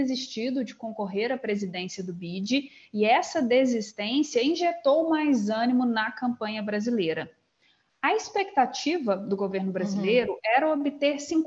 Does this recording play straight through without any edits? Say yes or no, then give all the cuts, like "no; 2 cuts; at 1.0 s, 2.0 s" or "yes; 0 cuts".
yes; 0 cuts